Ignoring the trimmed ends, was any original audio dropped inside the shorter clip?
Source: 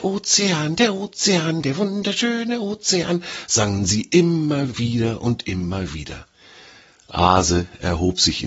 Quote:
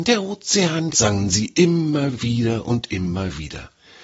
yes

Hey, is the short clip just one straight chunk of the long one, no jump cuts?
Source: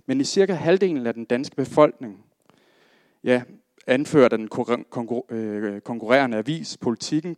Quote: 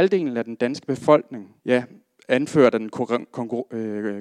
no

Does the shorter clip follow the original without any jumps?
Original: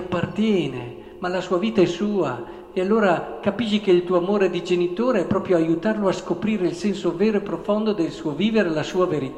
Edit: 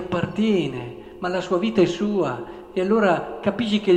yes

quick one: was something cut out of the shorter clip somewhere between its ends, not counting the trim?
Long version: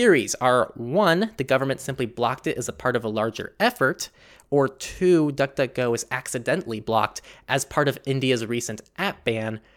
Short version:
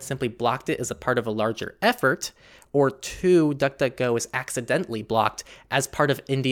no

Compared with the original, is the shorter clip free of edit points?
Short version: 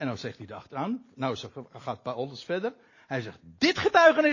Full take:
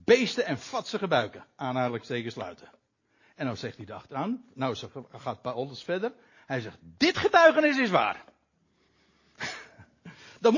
yes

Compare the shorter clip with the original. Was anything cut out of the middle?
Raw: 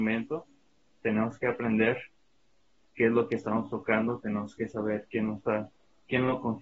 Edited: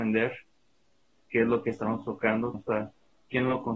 yes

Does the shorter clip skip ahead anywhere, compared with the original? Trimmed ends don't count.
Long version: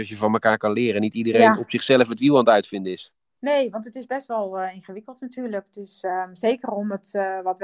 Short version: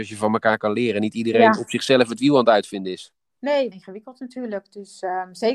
yes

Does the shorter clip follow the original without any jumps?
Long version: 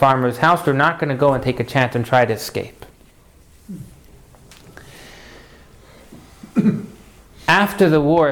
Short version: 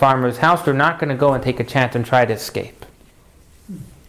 yes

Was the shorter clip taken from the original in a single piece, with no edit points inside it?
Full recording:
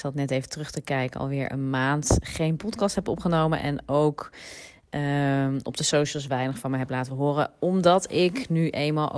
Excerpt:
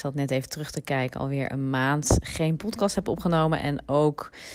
yes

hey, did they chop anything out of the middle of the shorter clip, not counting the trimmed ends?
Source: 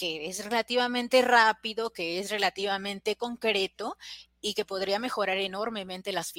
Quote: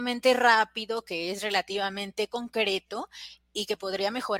no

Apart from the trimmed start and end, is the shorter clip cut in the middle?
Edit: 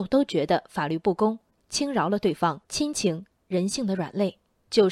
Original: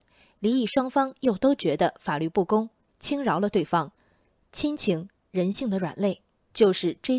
yes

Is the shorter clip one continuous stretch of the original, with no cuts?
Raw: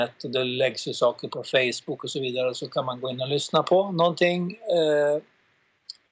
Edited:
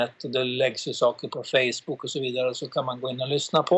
yes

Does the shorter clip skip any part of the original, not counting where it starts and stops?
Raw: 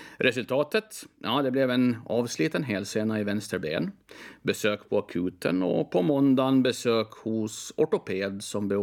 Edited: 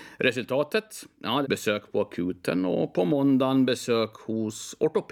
yes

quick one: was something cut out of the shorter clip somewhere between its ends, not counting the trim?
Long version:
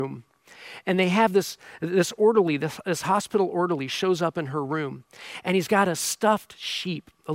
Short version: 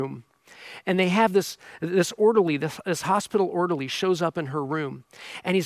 no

